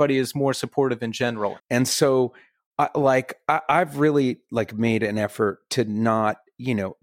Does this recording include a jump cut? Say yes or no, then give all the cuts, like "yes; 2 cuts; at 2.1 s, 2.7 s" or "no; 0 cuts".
yes; 1 cut; at 1.6 s